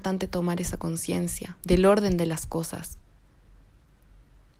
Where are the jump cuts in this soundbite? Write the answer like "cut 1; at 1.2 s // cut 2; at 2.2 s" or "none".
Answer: cut 1; at 1.6 s

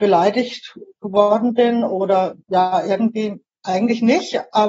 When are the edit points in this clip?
none

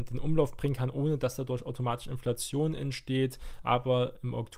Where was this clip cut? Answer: none

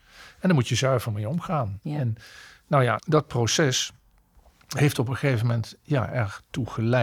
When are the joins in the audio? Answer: cut 1; at 3.0 s

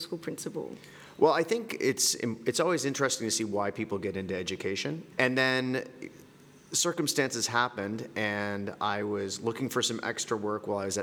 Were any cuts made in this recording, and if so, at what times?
cut 1; at 5.1 s

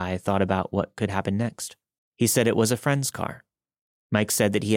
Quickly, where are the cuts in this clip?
cut 1; at 2.0 s

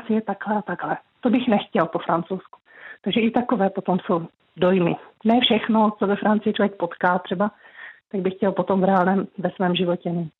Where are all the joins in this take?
none

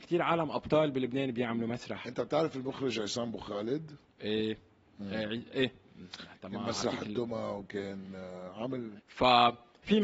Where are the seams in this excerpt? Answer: cut 1; at 9.0 s

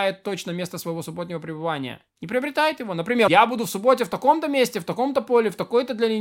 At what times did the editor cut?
cut 1; at 2.1 s // cut 2; at 3.3 s

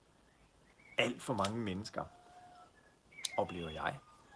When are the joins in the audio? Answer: cut 1; at 1.0 s

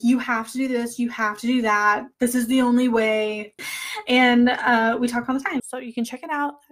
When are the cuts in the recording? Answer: cut 1; at 3.6 s // cut 2; at 5.6 s

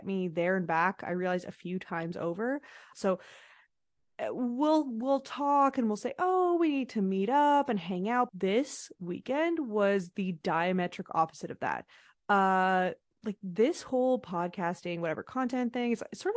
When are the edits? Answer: cut 1; at 2.9 s // cut 2; at 8.3 s

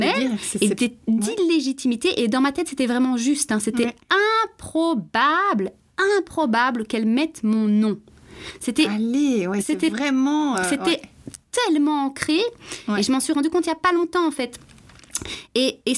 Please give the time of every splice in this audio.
none

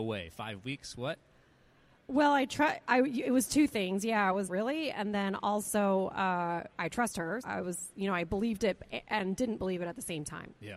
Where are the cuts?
cut 1; at 4.5 s // cut 2; at 7.4 s

